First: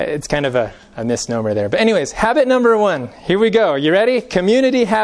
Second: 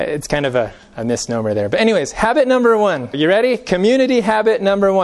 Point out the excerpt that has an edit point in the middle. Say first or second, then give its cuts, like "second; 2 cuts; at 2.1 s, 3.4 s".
second; 1 cut; at 3.1 s